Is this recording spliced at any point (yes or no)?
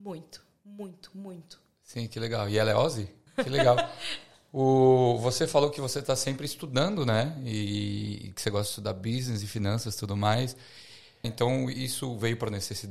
yes